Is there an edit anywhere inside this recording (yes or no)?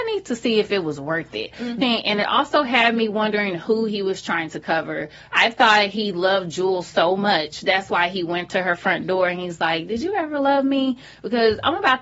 yes